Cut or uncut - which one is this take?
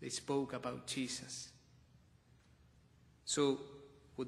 uncut